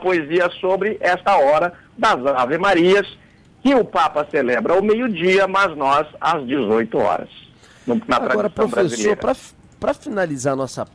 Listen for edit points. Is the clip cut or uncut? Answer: uncut